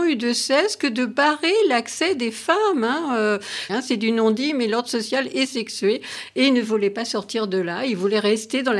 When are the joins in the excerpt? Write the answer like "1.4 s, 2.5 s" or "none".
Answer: 3.7 s